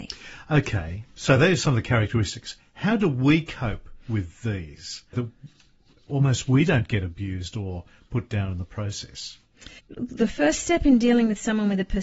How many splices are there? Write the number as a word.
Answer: two